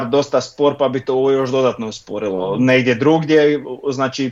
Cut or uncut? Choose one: uncut